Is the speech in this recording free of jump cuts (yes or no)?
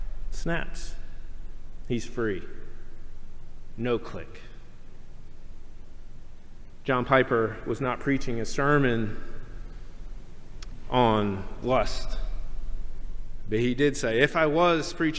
yes